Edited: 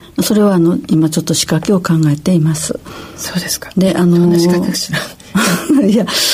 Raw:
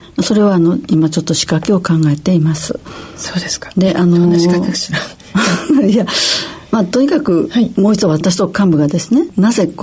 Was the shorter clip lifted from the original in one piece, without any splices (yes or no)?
yes